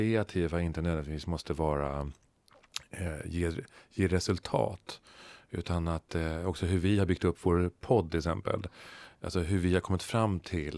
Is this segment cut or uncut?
uncut